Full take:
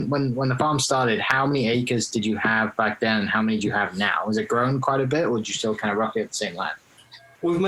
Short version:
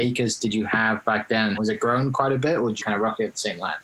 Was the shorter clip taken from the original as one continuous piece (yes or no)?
no